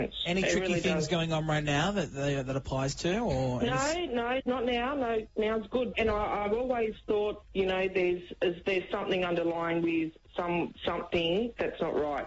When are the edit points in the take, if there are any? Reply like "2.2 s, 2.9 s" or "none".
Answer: 4.4 s, 5.9 s